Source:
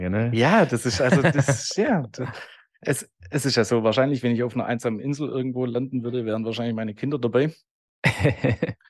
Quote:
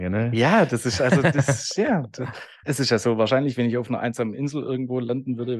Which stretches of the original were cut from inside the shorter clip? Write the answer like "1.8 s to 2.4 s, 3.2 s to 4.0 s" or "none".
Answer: 2.6 s to 3.3 s